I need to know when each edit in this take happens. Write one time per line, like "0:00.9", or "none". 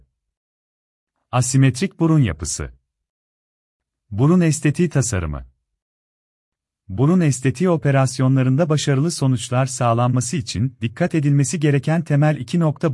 none

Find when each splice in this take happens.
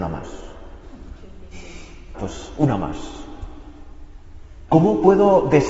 0:02.1
0:04.7

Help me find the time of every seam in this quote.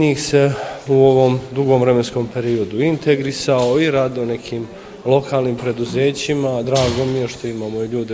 none

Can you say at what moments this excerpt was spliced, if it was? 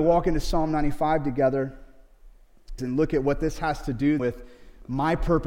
0:02.8
0:04.2

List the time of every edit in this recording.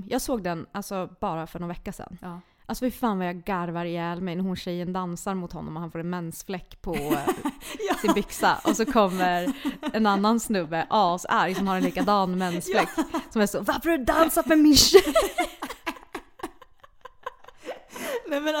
none

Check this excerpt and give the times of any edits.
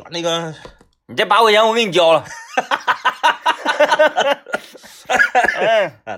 none

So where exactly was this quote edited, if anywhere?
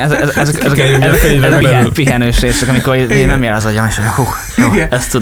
0:01.6

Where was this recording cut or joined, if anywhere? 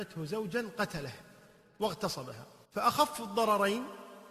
0:02.6

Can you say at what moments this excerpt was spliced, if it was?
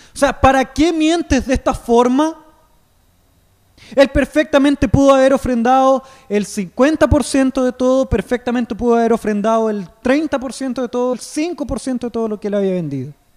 0:03.7
0:11.1

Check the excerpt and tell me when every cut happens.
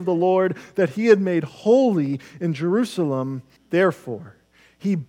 0:03.6

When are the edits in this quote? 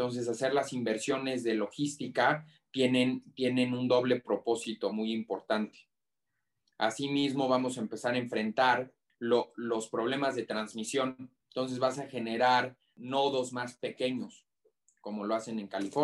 none

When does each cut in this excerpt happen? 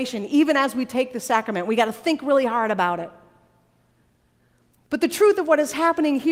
none

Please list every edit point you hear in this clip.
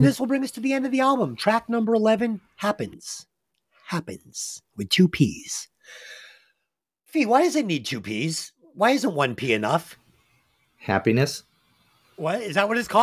none

